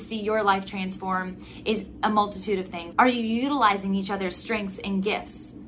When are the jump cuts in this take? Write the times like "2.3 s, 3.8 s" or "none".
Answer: 2.9 s